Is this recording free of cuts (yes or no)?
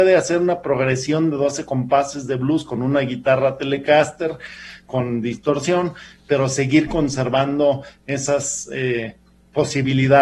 yes